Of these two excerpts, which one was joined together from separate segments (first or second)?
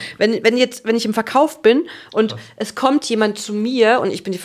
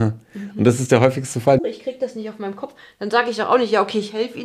second